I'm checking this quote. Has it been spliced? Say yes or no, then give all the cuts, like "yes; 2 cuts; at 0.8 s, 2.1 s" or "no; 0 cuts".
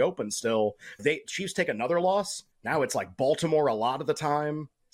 yes; 2 cuts; at 1.0 s, 2.5 s